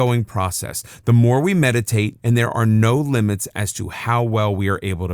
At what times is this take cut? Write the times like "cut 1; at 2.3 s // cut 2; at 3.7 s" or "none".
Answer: cut 1; at 2.2 s